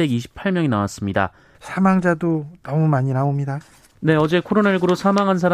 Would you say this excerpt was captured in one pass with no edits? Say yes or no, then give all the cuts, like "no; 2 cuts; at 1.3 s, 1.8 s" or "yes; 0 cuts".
no; 1 cut; at 1.5 s